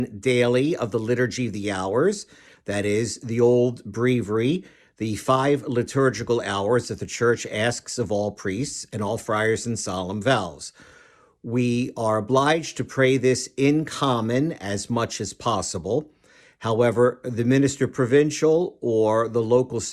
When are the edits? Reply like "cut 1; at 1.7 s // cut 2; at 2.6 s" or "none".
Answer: none